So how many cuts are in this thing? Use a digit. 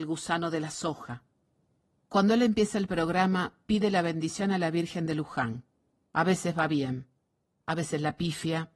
1